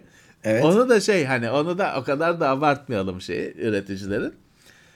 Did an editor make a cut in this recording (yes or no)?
no